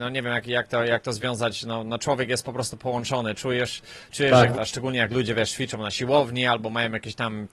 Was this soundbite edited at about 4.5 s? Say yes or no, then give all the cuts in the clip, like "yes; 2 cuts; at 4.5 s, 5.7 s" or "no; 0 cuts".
yes; 1 cut; at 4.5 s